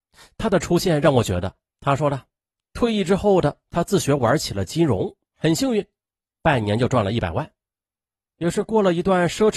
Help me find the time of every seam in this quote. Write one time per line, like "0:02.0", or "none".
0:01.7
0:05.3